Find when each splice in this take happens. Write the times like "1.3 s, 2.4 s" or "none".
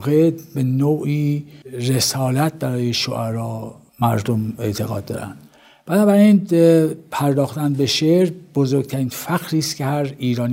1.6 s